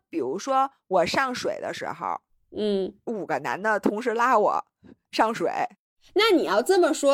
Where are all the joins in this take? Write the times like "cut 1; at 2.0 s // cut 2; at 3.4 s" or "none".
none